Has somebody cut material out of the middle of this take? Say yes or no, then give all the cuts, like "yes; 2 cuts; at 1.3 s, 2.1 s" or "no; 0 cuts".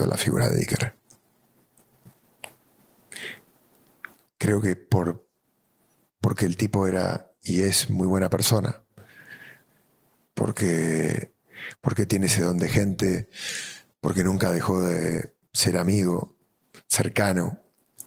no; 0 cuts